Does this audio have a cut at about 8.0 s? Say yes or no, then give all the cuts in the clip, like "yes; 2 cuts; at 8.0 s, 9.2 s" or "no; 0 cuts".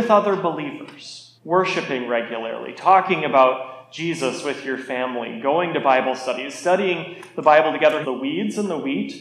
yes; 2 cuts; at 1.4 s, 8.0 s